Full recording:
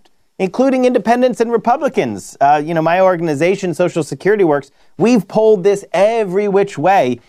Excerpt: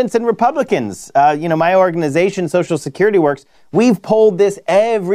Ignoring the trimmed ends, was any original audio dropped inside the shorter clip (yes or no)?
no